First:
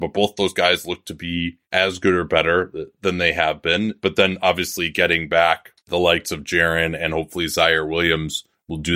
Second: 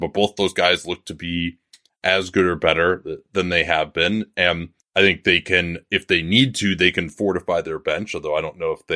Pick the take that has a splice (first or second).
first